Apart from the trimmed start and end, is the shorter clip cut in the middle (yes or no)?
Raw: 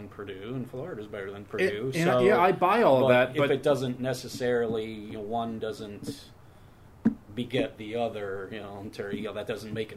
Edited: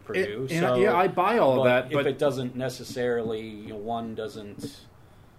no